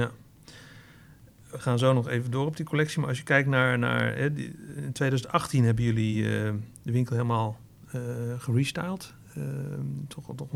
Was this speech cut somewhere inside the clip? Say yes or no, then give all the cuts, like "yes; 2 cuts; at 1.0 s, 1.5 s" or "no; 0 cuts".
no; 0 cuts